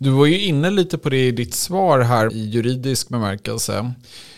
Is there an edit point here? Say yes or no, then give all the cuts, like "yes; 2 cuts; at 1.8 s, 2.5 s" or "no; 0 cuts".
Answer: yes; 1 cut; at 2.3 s